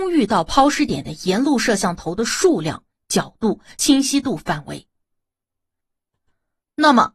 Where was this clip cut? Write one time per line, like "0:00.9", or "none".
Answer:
none